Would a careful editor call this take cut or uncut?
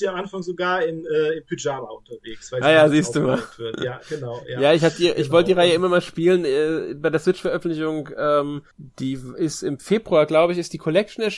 cut